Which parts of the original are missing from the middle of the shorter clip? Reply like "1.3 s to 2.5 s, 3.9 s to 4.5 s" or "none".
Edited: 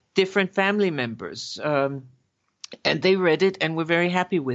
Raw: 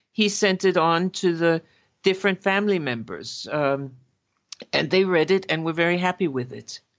none